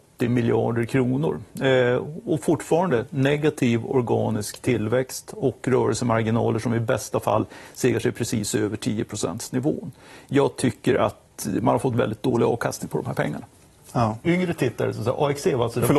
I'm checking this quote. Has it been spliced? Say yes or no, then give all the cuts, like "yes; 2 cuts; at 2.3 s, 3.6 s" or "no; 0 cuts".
yes; 1 cut; at 14.2 s